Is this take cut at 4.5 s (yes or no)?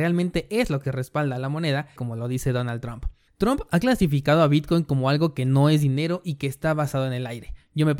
no